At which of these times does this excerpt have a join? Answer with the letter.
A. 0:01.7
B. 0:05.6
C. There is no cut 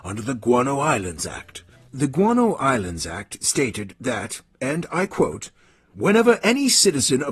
C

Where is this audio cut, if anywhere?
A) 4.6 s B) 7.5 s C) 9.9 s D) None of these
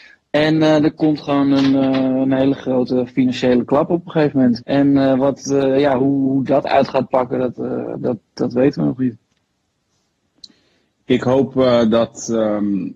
A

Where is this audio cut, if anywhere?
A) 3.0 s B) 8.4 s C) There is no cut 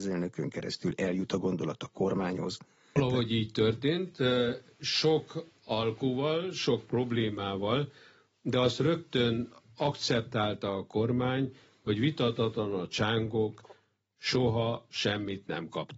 A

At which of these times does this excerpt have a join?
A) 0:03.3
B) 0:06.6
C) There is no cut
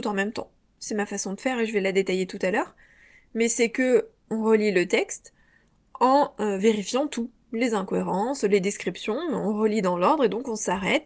C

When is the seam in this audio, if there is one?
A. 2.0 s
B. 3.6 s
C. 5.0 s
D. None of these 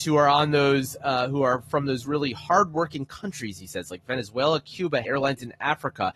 C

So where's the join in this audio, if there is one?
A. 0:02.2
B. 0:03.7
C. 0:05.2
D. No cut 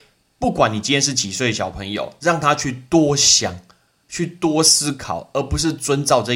D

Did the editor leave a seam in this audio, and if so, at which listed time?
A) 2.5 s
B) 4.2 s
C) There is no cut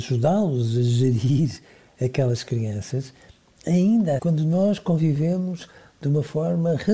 B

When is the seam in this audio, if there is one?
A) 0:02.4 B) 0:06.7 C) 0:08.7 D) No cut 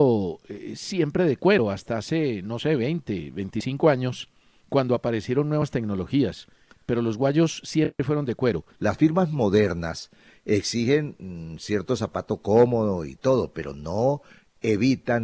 C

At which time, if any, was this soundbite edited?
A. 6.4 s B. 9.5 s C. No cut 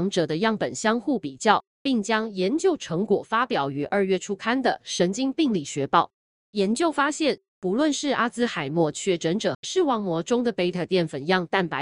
B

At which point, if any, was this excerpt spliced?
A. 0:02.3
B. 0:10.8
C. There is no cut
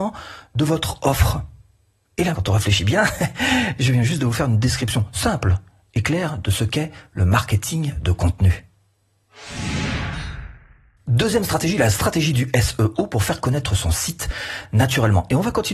A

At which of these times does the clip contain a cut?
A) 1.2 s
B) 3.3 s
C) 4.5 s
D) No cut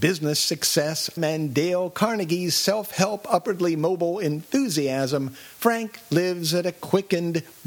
A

